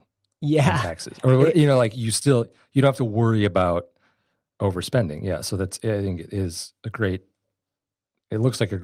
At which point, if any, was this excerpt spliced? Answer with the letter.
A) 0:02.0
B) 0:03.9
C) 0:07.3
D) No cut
D